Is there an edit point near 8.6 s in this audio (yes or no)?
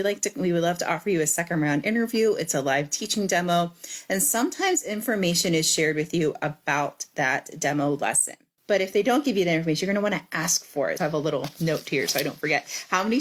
yes